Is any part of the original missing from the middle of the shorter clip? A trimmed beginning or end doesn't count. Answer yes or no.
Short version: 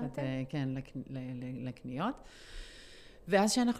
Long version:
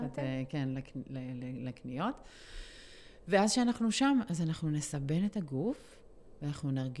no